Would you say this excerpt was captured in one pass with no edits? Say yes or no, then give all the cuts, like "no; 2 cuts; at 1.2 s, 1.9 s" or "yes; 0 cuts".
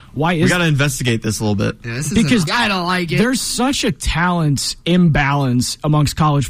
no; 1 cut; at 2.5 s